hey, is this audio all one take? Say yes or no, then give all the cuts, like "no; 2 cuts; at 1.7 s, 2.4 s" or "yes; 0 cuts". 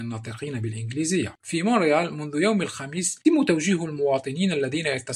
no; 1 cut; at 3.2 s